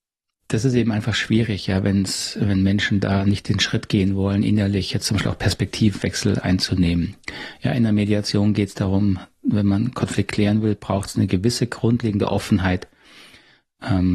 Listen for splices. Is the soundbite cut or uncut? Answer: uncut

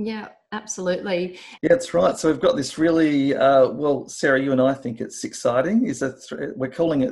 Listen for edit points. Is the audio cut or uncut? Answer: cut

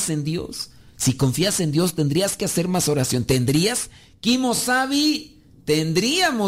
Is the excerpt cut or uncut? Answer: uncut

